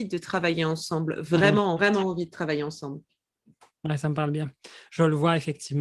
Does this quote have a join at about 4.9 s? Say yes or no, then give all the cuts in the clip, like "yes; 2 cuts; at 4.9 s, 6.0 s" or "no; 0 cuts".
no; 1 cut; at 1.8 s